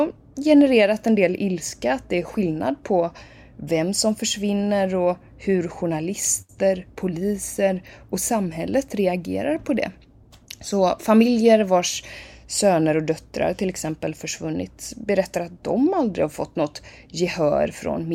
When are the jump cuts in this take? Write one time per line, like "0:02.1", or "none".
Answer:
none